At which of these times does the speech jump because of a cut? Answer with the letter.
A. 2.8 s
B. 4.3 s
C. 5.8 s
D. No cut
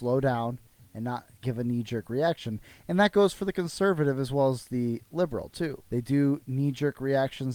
C